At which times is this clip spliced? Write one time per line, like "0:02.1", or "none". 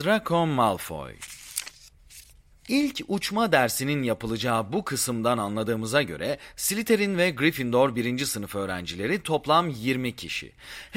0:02.5